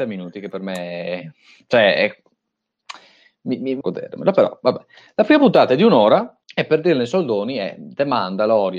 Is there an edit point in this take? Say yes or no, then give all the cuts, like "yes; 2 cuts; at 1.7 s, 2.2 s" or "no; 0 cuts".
yes; 2 cuts; at 3.8 s, 6.4 s